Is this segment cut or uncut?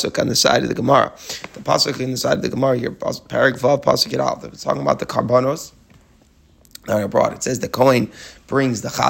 uncut